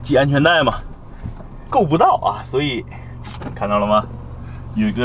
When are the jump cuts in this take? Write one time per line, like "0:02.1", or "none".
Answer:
0:01.7